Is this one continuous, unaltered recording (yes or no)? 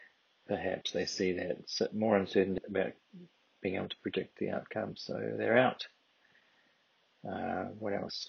no